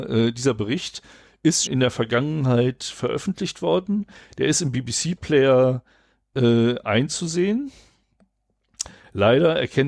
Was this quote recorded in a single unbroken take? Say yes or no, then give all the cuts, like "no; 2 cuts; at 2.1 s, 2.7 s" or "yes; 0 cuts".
no; 1 cut; at 1.6 s